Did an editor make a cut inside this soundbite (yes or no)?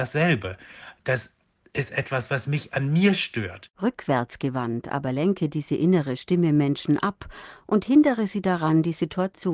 yes